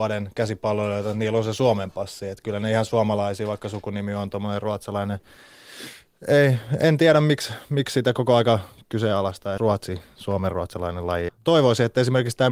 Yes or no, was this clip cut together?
yes